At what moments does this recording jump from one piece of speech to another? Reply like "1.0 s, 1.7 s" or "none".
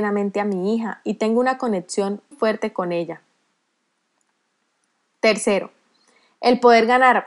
2.3 s